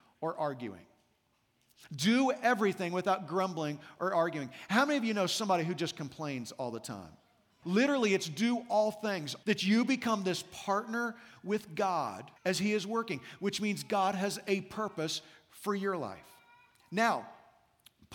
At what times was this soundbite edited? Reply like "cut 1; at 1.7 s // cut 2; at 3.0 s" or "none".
cut 1; at 7.6 s // cut 2; at 9.4 s // cut 3; at 12.4 s